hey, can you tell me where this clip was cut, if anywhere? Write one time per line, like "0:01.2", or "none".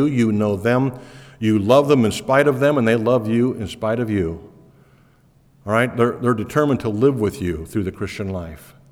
none